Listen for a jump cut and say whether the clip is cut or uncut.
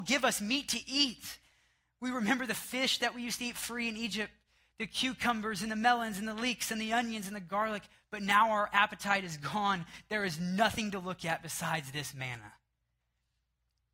uncut